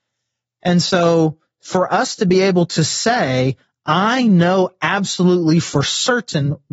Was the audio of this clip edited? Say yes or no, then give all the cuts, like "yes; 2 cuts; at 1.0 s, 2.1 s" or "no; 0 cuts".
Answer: no; 0 cuts